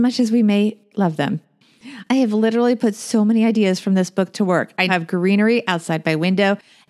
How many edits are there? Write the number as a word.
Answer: two